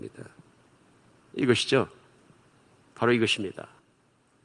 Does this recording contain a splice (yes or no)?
no